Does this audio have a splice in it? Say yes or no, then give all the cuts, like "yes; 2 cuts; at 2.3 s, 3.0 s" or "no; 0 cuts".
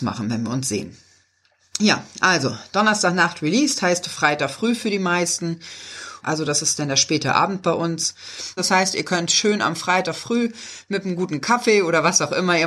yes; 2 cuts; at 6.2 s, 8.6 s